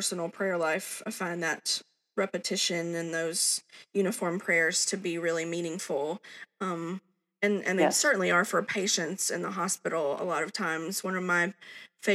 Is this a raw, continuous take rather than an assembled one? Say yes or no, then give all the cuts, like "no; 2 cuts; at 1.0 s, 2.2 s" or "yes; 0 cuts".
yes; 0 cuts